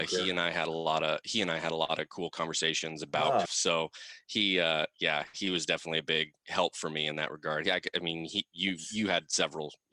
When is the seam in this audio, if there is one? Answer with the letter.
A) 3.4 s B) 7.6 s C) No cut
A